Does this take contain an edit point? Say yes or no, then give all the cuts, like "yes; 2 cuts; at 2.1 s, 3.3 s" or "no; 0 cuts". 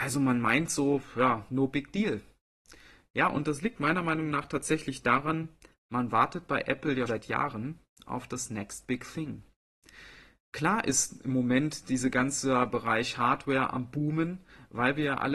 yes; 1 cut; at 7.1 s